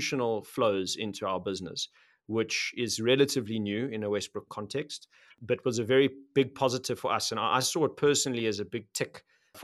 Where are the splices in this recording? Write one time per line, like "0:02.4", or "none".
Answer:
none